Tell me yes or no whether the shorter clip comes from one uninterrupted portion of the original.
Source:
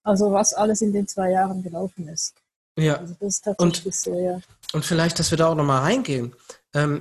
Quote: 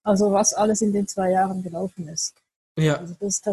yes